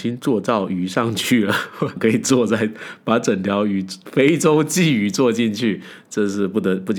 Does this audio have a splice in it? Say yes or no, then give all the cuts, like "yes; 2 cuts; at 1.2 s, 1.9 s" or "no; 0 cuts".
yes; 1 cut; at 2.0 s